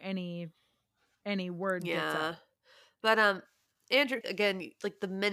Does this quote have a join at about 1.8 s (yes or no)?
no